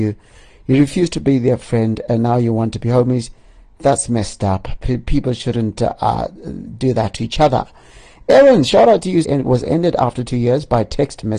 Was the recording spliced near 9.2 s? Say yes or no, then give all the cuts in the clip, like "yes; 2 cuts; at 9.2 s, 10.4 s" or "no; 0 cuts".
yes; 1 cut; at 9.2 s